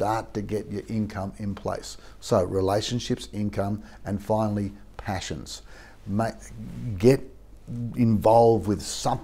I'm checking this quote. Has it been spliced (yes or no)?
no